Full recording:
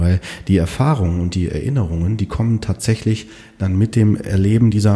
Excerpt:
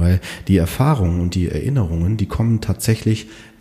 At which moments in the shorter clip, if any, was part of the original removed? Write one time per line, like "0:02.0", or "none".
none